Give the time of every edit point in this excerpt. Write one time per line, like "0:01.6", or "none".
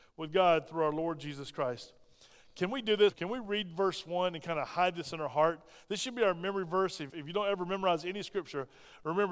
0:03.1
0:07.1